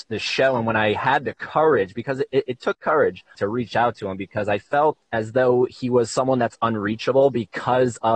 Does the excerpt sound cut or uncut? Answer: cut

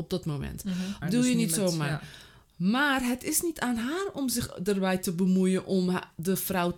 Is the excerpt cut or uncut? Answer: cut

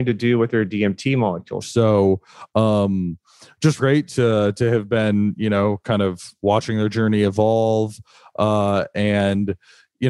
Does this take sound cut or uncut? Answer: cut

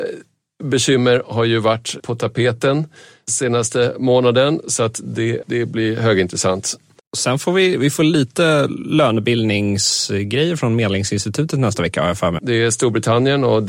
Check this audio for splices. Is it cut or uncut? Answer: cut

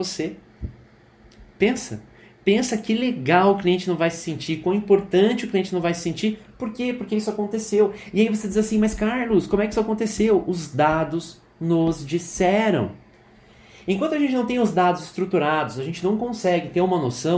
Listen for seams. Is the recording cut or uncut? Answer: uncut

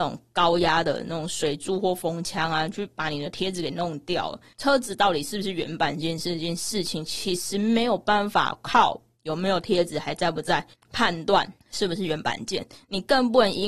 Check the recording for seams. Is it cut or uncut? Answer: uncut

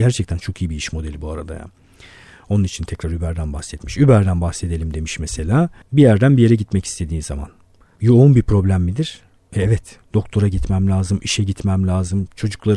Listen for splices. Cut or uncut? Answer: cut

